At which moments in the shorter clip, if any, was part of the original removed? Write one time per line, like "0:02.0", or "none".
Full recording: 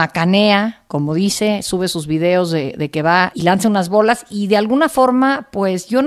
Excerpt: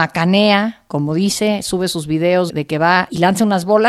0:02.5